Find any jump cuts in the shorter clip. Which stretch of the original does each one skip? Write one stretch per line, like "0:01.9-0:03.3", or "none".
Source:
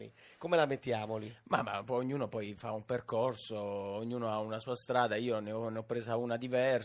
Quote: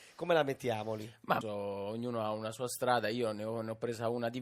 0:01.6-0:03.5